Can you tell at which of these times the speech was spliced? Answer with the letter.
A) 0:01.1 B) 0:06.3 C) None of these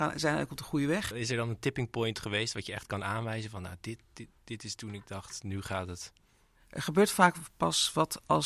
A